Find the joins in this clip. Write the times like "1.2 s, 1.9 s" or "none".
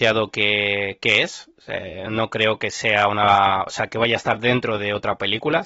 none